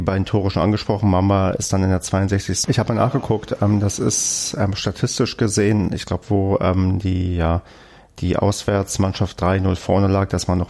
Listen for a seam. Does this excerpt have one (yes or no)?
yes